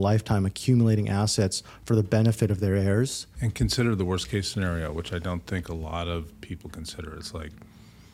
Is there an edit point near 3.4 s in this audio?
yes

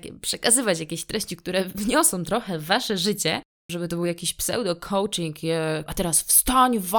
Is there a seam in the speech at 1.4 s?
no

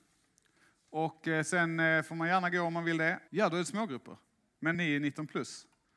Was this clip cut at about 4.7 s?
yes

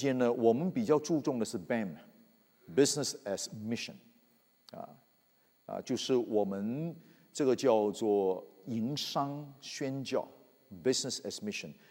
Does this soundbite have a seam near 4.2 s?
no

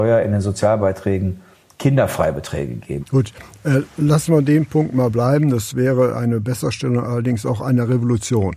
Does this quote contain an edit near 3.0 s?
yes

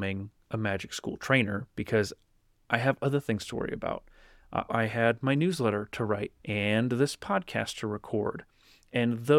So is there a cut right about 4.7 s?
yes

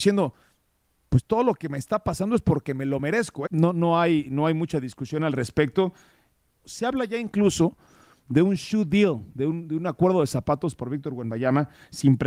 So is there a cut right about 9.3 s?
no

